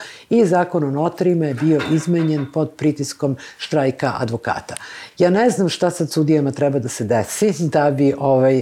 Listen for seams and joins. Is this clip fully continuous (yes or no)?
yes